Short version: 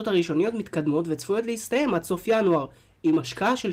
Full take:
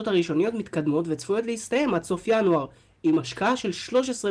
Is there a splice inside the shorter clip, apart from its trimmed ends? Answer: no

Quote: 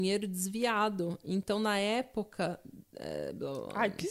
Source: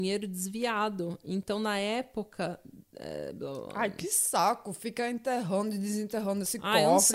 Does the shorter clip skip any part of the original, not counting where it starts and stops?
no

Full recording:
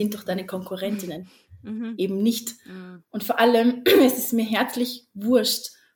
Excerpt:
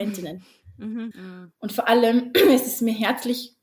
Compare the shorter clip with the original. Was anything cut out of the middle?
yes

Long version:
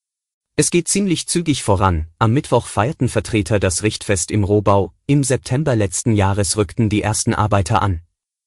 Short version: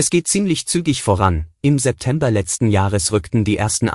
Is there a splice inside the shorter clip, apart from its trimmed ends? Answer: yes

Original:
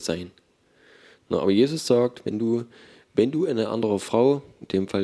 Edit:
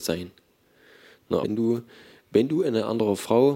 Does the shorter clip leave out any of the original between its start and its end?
yes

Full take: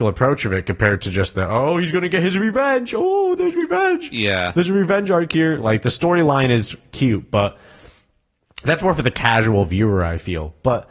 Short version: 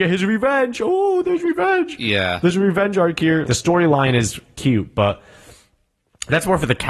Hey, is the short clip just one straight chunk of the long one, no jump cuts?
no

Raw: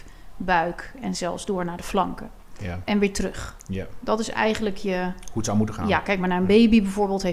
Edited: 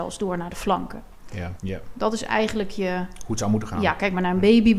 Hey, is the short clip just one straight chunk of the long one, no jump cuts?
no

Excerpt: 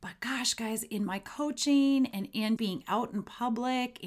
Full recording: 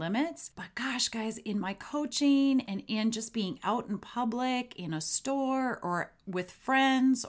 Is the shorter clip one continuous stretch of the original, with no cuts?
no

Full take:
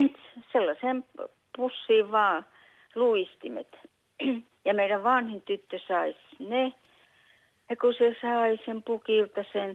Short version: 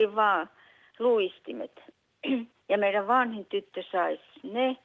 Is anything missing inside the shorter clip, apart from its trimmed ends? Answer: no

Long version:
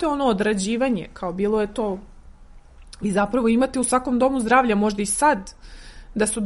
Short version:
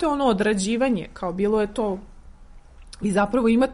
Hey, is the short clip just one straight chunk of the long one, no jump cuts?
yes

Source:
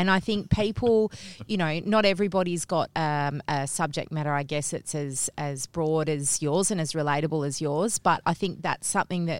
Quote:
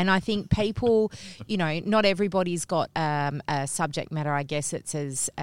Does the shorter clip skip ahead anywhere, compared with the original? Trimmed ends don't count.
no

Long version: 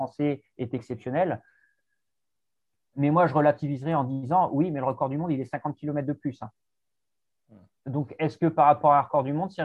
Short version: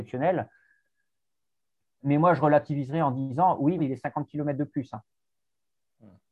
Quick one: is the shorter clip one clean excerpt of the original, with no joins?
no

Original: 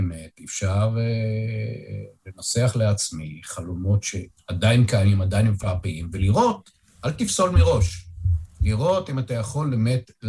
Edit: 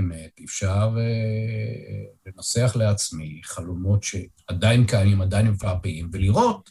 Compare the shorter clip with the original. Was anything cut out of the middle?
no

